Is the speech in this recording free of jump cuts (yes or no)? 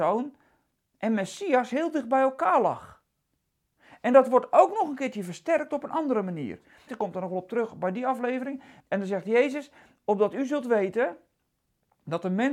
no